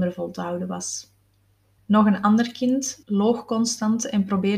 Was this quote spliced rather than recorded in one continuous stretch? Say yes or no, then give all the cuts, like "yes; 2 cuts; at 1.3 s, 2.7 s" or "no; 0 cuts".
yes; 2 cuts; at 1.8 s, 3.0 s